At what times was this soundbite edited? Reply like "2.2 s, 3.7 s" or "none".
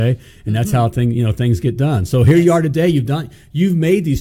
none